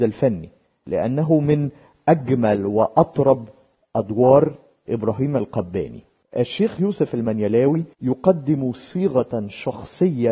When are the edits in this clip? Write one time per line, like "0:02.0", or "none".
0:07.9